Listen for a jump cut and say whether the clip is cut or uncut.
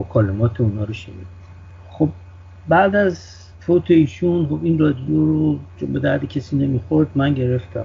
cut